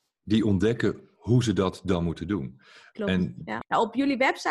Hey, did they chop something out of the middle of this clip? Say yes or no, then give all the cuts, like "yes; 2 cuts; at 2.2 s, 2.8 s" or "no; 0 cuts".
yes; 1 cut; at 3.6 s